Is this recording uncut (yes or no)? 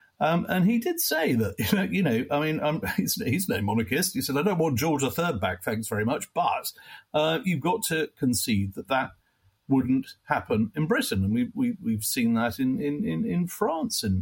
yes